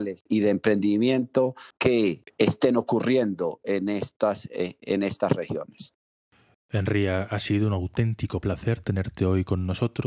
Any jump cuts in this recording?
no; 0 cuts

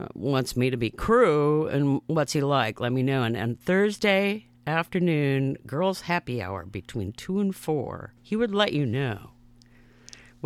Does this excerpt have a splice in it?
yes; 1 cut; at 8.2 s

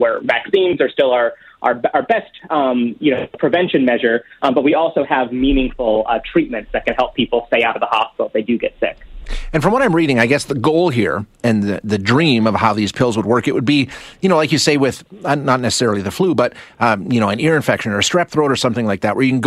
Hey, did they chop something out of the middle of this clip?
no; 0 cuts

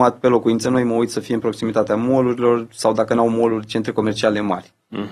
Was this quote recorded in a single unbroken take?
yes; 0 cuts

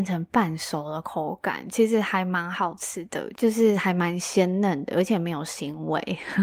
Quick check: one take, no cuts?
yes; 0 cuts

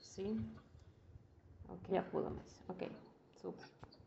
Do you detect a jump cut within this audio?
yes; 1 cut; at 1.9 s

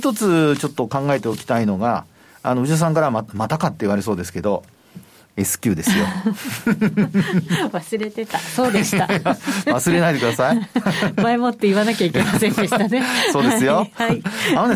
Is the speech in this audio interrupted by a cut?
no; 0 cuts

